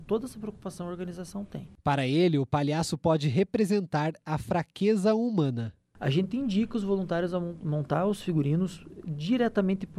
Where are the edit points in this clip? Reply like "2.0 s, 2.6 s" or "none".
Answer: none